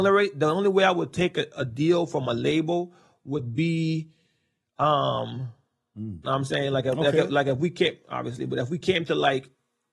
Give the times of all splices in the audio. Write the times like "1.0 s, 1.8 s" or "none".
6.2 s